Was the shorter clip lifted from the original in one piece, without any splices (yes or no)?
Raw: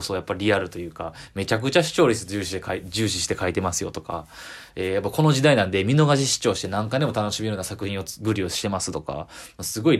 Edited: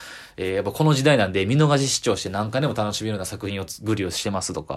yes